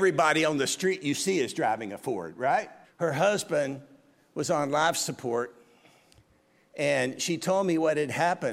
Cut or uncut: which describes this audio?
cut